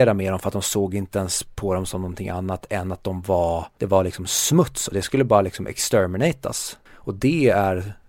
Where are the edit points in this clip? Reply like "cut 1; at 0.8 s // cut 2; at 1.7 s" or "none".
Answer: cut 1; at 6.9 s